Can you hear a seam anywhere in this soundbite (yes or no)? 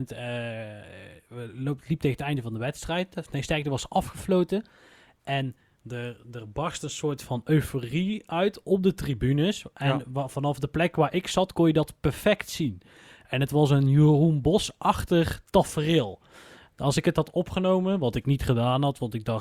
no